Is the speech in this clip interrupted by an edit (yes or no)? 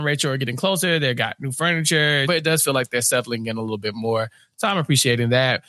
yes